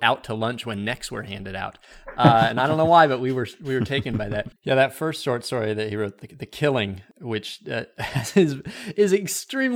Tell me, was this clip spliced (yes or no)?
yes